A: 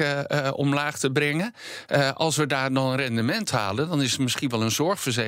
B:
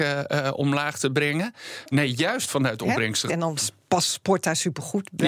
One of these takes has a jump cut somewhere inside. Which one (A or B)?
B